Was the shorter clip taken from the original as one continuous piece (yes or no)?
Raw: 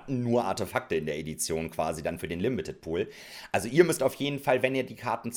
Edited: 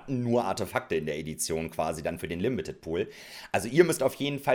yes